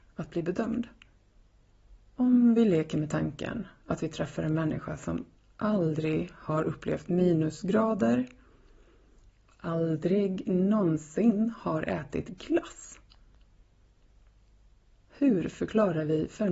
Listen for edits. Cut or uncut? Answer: cut